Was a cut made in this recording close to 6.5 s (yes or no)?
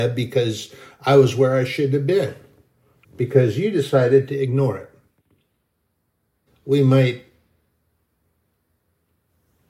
yes